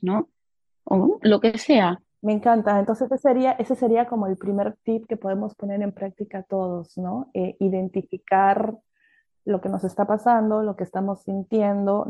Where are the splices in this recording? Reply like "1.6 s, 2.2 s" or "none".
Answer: none